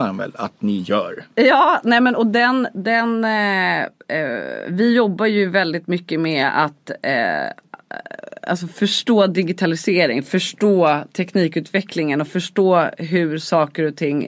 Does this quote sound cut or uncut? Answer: uncut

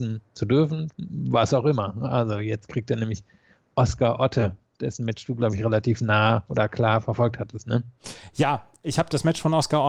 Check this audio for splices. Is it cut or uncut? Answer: cut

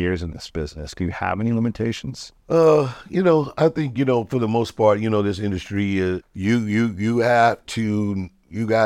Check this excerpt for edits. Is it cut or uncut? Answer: cut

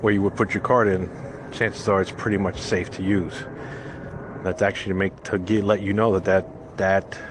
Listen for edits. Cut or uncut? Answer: cut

